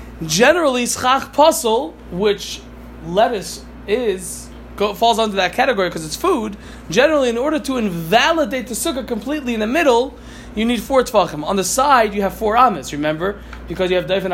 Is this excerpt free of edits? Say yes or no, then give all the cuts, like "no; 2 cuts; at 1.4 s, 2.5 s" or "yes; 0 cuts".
yes; 0 cuts